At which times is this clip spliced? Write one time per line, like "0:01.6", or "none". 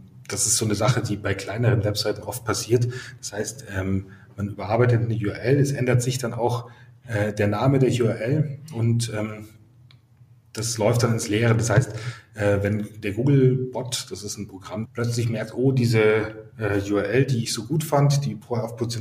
0:14.8